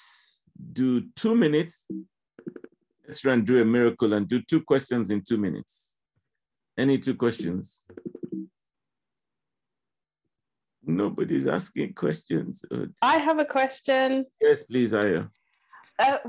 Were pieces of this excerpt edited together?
no; 0 cuts

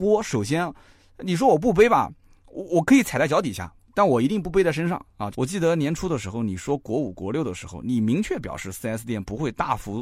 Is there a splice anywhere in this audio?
yes; 1 cut; at 5.3 s

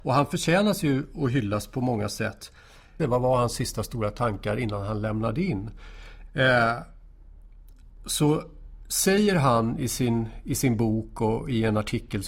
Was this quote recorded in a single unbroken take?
no; 2 cuts; at 3.0 s, 6.3 s

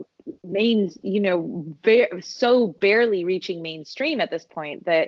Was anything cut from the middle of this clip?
no; 0 cuts

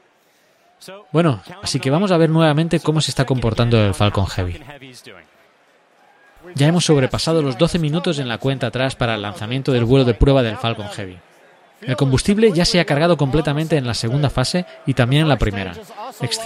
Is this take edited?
yes; 1 cut; at 1.6 s

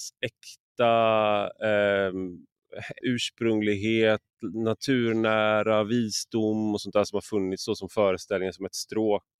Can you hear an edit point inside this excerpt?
yes; 1 cut; at 3.0 s

